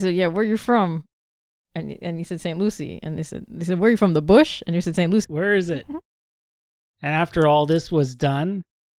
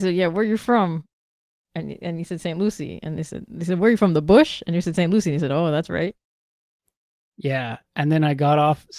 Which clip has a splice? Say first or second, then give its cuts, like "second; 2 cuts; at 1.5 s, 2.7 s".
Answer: first; 1 cut; at 5.2 s